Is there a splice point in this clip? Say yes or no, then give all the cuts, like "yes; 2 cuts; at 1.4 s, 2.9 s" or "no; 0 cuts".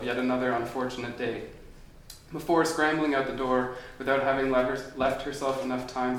no; 0 cuts